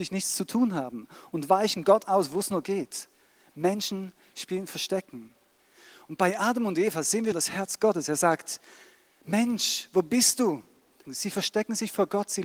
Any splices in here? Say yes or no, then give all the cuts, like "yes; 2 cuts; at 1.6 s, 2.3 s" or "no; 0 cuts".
yes; 2 cuts; at 7.3 s, 11.0 s